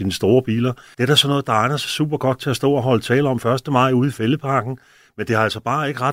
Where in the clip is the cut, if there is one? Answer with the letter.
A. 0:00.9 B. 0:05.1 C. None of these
A